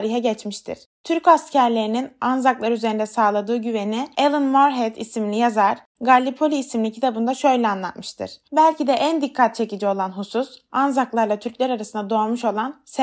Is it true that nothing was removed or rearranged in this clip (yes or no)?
yes